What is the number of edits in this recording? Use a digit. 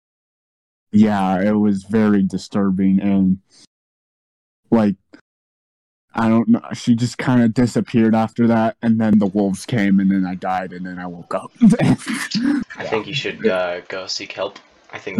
0